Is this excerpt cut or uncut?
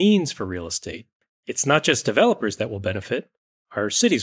uncut